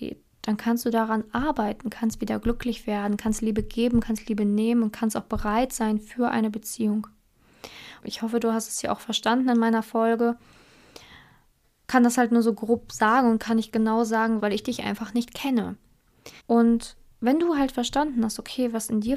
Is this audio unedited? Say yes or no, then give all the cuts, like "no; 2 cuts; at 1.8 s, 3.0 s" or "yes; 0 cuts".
no; 3 cuts; at 8.0 s, 14.4 s, 16.4 s